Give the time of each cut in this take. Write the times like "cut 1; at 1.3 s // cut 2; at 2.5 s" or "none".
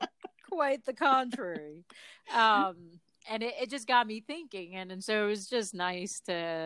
none